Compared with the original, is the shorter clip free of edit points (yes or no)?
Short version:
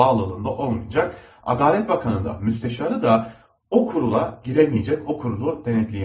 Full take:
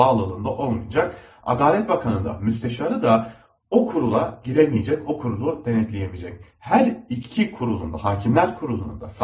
yes